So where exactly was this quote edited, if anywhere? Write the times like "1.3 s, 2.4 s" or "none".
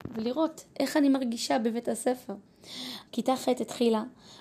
3.1 s